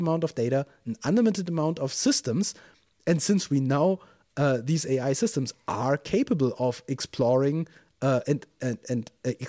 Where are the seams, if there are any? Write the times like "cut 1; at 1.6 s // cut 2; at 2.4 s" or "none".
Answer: none